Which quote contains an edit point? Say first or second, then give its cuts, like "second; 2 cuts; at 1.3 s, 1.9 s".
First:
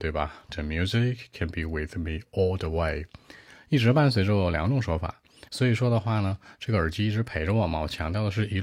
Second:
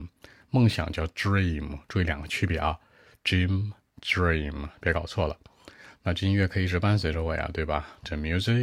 first; 1 cut; at 5.5 s